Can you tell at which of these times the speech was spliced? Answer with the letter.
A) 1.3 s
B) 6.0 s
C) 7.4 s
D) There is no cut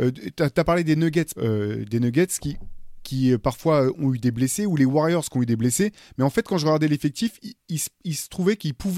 A